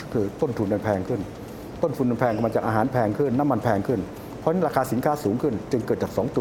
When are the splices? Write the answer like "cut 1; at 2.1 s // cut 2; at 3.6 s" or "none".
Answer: cut 1; at 3.3 s